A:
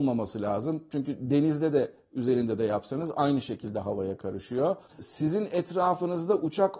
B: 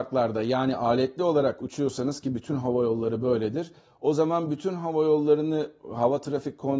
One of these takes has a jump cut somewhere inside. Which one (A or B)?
A